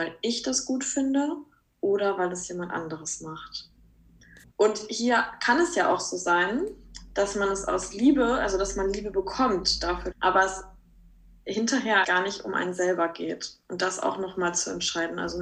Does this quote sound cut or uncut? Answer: cut